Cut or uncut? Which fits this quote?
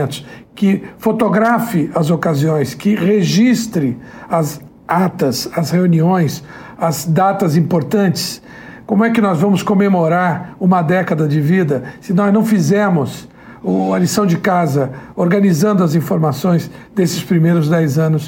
uncut